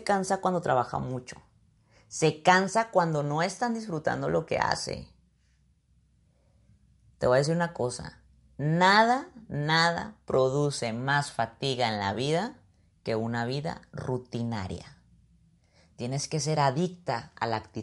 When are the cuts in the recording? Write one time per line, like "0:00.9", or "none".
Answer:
none